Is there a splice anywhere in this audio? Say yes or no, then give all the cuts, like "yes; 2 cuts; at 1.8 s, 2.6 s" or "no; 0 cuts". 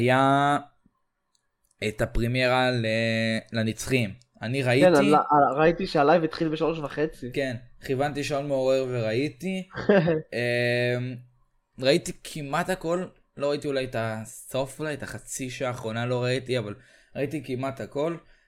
no; 0 cuts